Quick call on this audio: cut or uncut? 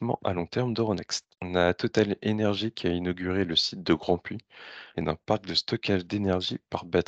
cut